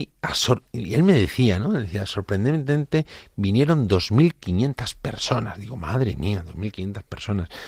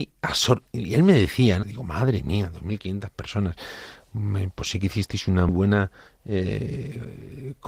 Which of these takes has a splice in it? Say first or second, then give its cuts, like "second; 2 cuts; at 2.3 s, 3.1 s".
second; 2 cuts; at 1.6 s, 5.5 s